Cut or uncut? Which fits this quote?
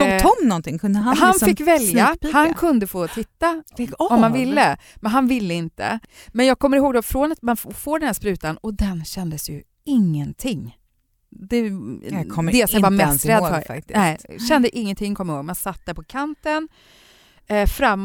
uncut